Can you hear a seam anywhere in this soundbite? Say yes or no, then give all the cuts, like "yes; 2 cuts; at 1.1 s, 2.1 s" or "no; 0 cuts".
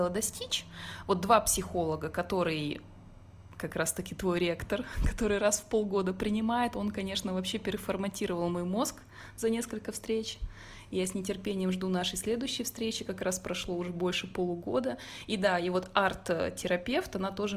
no; 0 cuts